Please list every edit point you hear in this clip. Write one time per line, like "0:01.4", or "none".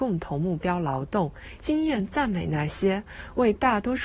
0:01.6